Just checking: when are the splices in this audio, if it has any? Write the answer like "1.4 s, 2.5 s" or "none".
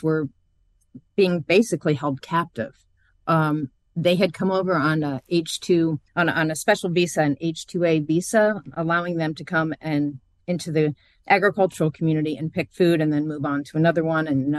6.1 s